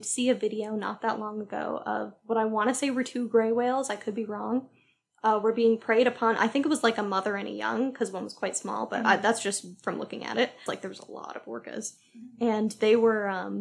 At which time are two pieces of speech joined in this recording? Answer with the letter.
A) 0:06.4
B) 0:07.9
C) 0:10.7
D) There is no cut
C